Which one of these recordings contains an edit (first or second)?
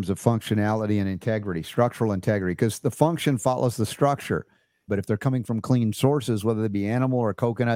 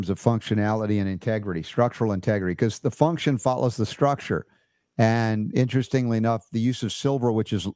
first